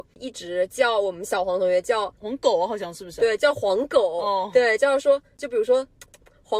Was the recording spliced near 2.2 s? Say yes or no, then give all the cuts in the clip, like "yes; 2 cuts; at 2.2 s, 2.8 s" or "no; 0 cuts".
yes; 1 cut; at 2.2 s